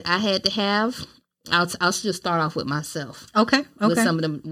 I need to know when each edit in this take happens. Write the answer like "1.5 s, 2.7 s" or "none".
none